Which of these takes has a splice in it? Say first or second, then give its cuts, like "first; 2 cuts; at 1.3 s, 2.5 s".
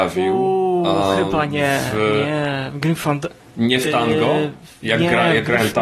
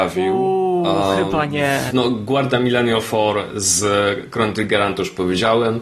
second; 1 cut; at 1.9 s